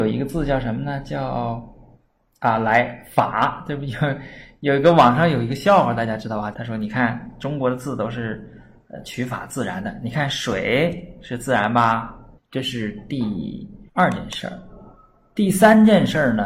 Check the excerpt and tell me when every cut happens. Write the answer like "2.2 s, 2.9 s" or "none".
6.5 s, 12.4 s, 13.9 s